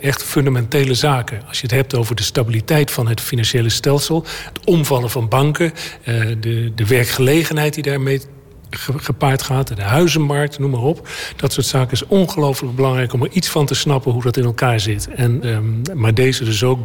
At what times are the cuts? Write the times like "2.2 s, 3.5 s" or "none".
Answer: 6.8 s, 15.4 s